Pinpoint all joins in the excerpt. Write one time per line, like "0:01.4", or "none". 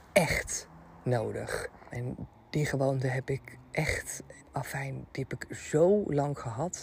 0:01.9
0:04.4